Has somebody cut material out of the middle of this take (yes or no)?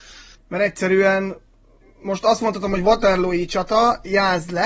no